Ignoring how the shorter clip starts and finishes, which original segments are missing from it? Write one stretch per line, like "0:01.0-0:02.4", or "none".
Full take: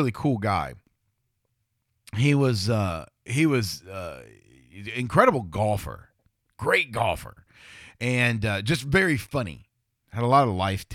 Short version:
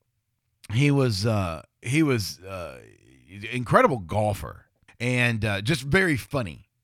0:06.3-0:07.9